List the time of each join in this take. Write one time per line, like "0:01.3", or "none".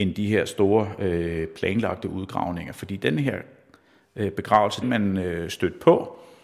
0:04.8